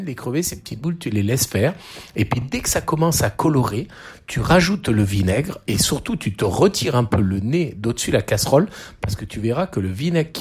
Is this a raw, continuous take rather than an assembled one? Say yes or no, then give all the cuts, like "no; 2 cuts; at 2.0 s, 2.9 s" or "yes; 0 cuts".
yes; 0 cuts